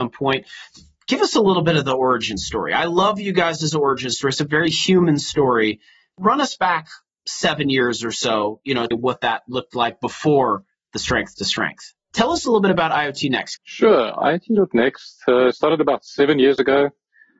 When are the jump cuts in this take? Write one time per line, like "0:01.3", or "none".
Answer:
0:08.9
0:12.1
0:13.6